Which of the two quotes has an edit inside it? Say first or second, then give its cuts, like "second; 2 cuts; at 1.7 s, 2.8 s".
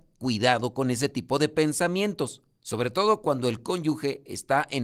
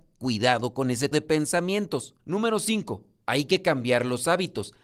second; 2 cuts; at 1.1 s, 2.2 s